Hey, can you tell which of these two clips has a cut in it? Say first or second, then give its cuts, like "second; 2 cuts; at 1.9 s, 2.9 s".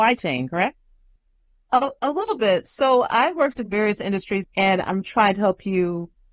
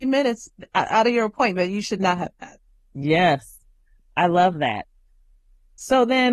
first; 1 cut; at 4.4 s